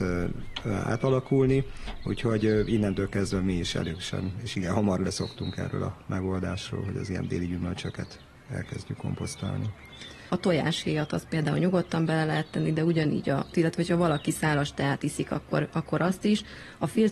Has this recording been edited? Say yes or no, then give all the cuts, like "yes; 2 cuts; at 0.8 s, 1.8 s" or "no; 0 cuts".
yes; 2 cuts; at 10.3 s, 13.5 s